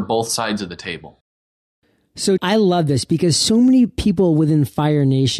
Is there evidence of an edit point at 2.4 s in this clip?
yes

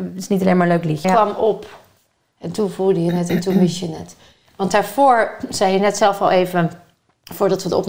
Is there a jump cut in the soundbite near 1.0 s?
yes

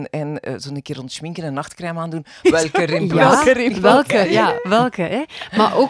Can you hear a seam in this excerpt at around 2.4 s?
yes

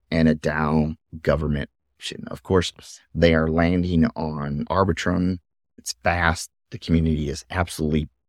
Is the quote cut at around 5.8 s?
yes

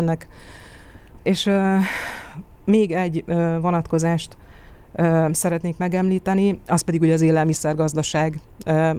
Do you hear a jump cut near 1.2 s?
yes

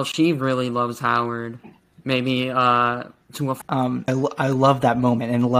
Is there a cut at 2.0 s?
no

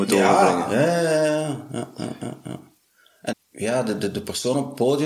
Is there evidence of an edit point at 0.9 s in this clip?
no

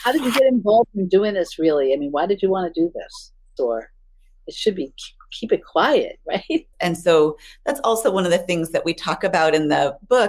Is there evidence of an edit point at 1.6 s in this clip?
no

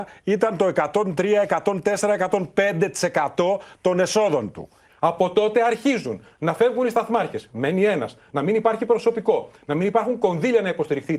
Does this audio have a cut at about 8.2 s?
no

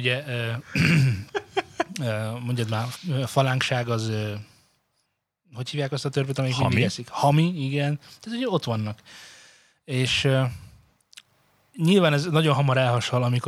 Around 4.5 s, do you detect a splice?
no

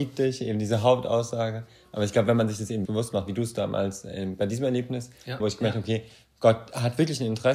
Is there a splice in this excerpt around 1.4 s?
no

